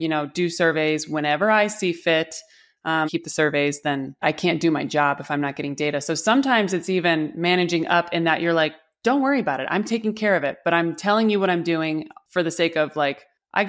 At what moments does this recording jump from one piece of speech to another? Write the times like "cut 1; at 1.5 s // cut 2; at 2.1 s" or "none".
cut 1; at 3.1 s